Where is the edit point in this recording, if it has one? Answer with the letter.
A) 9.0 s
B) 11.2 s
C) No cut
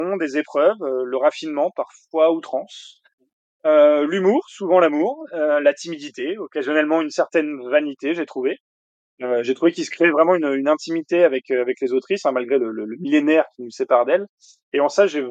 A